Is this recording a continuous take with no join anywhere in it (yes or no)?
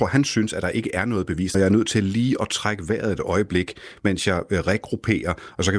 no